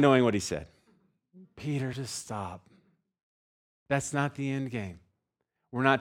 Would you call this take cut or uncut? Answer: uncut